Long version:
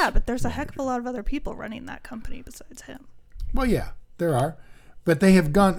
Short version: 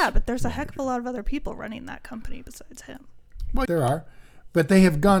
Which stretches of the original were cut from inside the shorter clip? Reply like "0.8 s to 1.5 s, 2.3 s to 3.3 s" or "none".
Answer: 3.7 s to 4.2 s